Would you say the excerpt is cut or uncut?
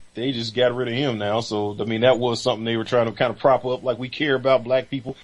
uncut